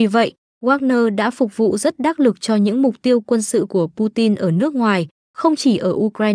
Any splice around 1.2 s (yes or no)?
no